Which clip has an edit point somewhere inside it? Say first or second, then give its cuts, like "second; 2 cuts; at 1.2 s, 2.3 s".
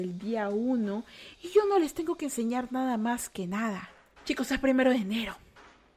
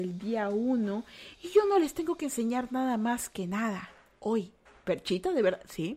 first; 1 cut; at 4.1 s